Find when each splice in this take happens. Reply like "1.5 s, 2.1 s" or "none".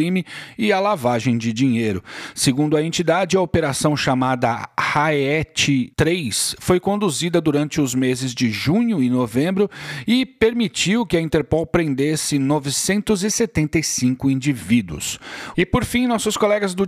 15.5 s